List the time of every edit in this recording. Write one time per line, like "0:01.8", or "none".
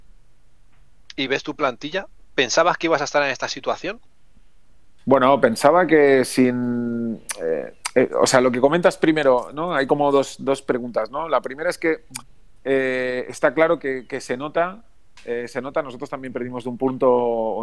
none